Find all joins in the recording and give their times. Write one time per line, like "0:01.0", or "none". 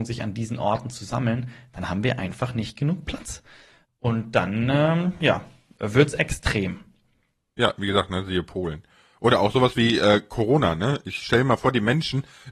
0:03.8